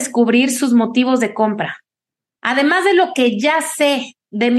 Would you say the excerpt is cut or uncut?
cut